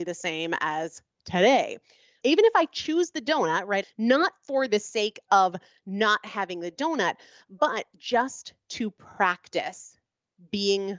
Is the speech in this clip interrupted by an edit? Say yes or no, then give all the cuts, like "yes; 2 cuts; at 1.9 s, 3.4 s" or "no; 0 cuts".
yes; 2 cuts; at 2.2 s, 3.8 s